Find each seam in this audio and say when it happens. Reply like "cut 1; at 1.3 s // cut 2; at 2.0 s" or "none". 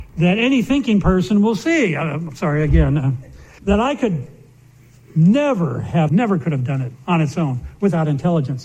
cut 1; at 3.6 s // cut 2; at 6.1 s